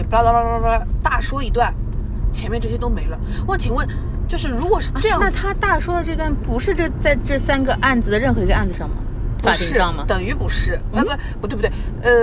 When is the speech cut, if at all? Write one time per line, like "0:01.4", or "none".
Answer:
none